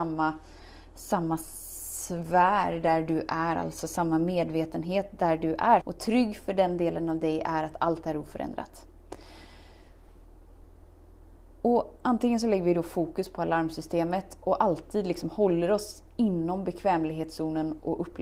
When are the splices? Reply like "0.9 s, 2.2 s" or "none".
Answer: 5.8 s

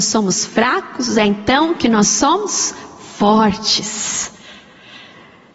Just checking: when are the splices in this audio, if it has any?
none

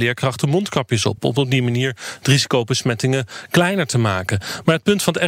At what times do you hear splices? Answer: none

